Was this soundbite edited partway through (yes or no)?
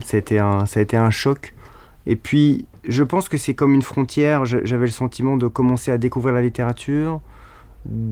no